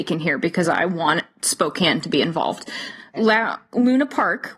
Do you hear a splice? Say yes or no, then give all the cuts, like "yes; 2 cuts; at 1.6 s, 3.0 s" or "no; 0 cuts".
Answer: yes; 1 cut; at 3.1 s